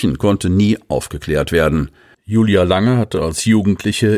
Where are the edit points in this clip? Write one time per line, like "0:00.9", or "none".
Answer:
0:02.1